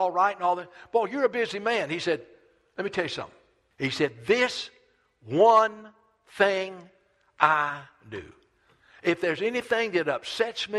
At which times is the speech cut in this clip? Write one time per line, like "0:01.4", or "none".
0:03.7